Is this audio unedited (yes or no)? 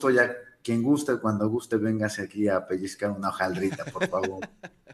yes